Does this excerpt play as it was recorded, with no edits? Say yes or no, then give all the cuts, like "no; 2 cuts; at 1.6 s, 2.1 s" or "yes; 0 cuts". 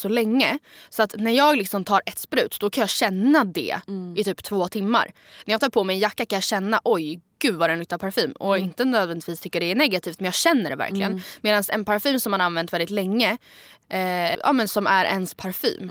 no; 1 cut; at 14.3 s